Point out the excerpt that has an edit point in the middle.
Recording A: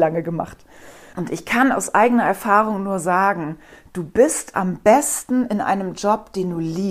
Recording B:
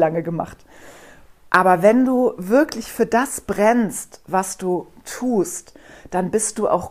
A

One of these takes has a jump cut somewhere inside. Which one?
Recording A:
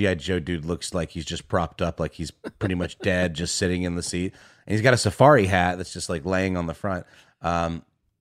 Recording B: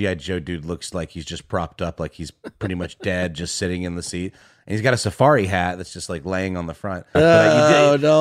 B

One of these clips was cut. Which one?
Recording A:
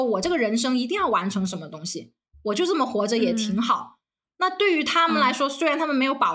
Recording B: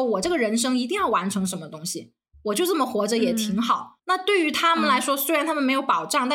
B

